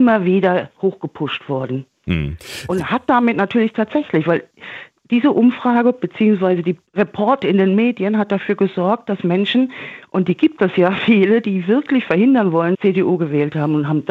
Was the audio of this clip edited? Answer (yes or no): yes